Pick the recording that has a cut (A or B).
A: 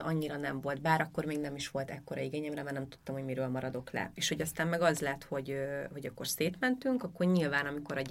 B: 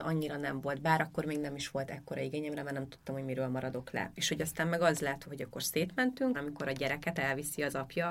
B